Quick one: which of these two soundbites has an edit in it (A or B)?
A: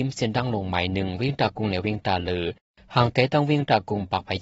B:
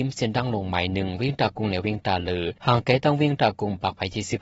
B